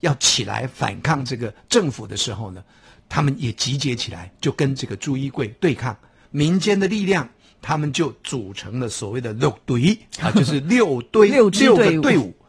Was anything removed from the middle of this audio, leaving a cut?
yes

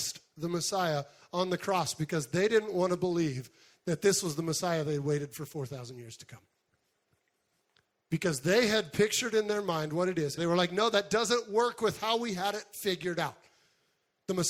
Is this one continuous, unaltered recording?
no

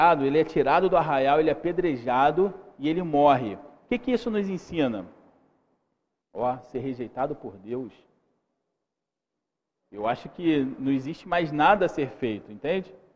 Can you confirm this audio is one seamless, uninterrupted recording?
no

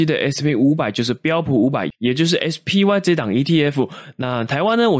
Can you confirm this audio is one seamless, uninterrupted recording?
yes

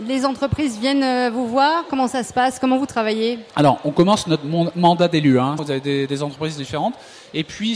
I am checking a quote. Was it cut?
yes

